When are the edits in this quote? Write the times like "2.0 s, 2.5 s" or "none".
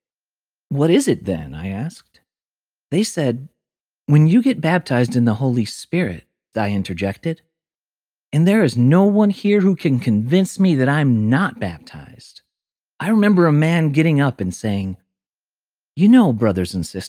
6.5 s, 12.8 s